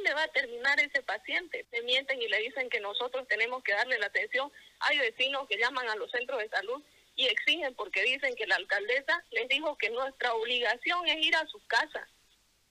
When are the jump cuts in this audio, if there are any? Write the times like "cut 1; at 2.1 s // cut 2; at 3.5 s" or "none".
cut 1; at 1.6 s // cut 2; at 9.3 s